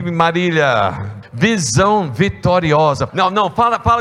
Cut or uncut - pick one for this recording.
cut